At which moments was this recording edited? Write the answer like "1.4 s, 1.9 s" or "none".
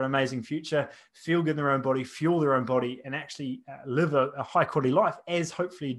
none